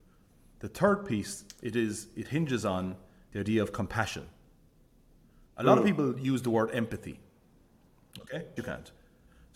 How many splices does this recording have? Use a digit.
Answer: 2